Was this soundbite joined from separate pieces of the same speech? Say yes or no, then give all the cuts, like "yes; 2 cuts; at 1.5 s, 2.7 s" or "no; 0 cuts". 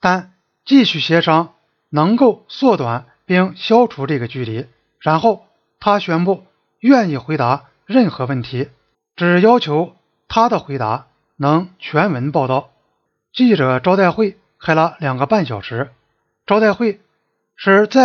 no; 0 cuts